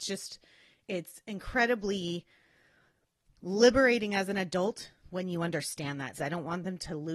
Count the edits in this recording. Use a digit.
1